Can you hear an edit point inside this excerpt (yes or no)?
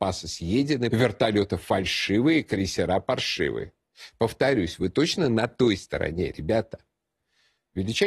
yes